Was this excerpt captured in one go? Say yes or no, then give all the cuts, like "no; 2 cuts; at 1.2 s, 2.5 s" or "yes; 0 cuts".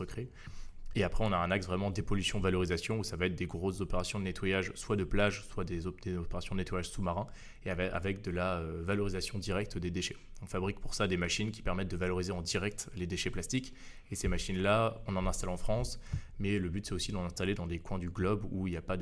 yes; 0 cuts